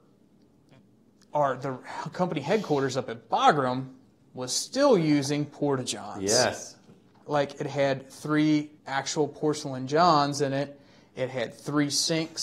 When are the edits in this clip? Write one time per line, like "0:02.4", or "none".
0:07.2
0:08.8

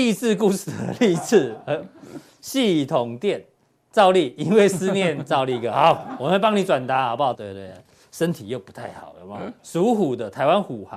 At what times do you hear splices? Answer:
0:07.3
0:09.6

